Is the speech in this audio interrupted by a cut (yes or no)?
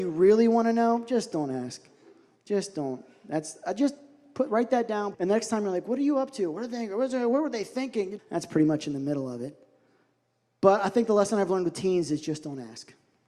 yes